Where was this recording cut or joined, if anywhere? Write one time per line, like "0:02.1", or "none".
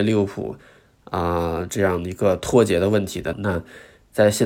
0:03.3